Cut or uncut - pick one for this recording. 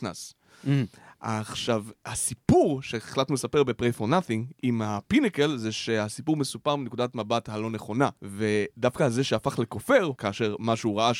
cut